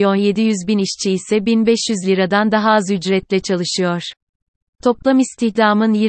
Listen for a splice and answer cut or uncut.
uncut